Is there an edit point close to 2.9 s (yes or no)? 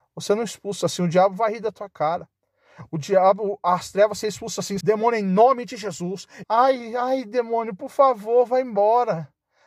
no